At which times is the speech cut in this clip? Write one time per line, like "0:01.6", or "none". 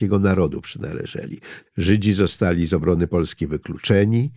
0:01.7